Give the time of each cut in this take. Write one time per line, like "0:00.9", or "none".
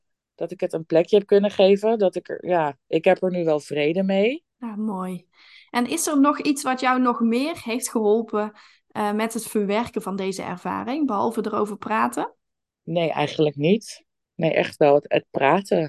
0:04.5